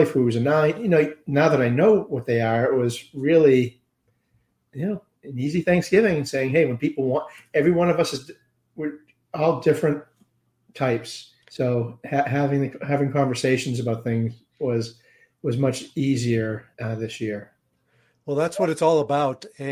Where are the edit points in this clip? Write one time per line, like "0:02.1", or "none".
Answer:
0:11.4
0:16.7